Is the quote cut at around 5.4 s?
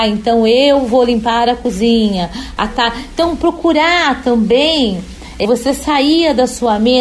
yes; 2 cuts; at 2.6 s, 5.4 s

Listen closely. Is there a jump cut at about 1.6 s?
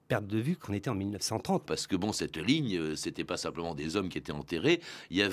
yes; 1 cut; at 1.6 s

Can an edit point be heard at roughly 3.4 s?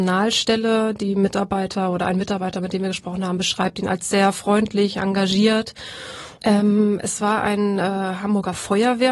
no; 1 cut; at 6.4 s

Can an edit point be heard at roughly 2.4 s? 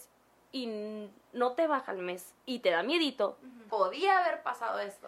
yes; 2 cuts; at 2.4 s, 3.7 s

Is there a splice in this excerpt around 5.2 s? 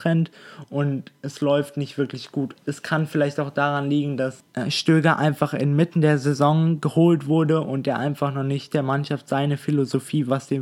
no; 1 cut; at 2.6 s

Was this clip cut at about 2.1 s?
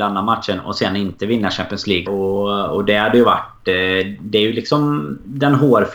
yes; 1 cut; at 2.1 s

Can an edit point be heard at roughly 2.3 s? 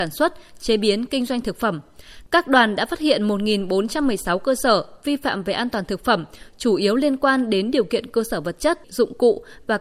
no; 1 cut; at 8.8 s

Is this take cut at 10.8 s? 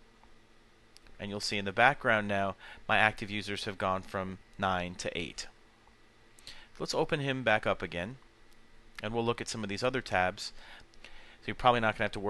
yes; 2 cuts; at 1.1 s, 10.8 s

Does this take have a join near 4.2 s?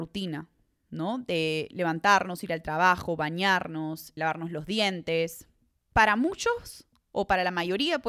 yes; 1 cut; at 4.2 s

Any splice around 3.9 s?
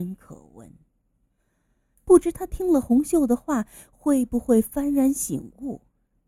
no; 1 cut; at 1.9 s

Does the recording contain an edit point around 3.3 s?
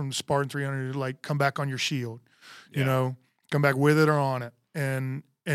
no; 0 cuts

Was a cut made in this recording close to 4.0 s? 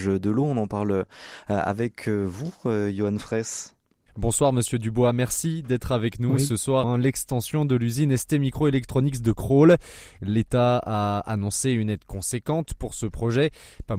no; 1 cut; at 6.8 s

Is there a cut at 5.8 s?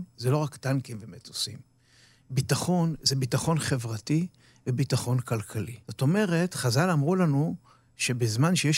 yes; 1 cut; at 5.8 s

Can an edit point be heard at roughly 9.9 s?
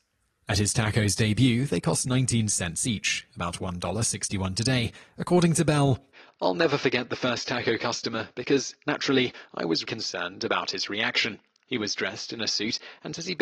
yes; 1 cut; at 9.9 s

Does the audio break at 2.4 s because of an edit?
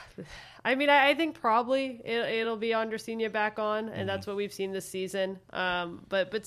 no; 0 cuts

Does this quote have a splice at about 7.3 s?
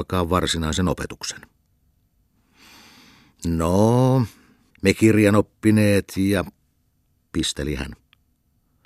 no; 1 cut; at 4.7 s

